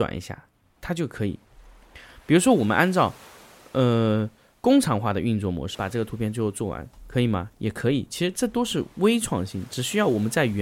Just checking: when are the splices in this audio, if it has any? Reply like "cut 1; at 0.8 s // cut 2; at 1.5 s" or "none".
cut 1; at 5.7 s